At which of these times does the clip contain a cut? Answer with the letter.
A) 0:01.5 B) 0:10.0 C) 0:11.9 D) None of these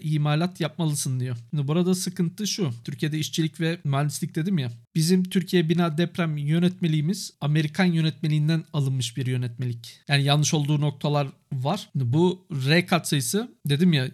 B